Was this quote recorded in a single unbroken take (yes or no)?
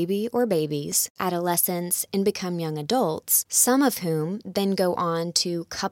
no